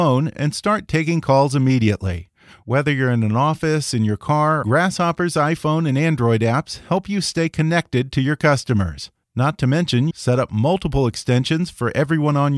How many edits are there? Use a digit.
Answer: 2